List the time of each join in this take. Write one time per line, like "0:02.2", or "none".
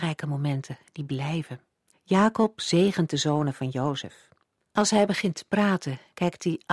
0:01.9
0:04.7